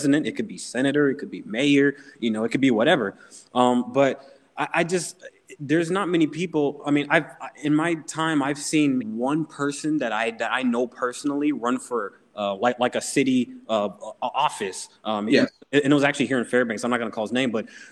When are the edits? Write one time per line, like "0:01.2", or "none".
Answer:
0:09.0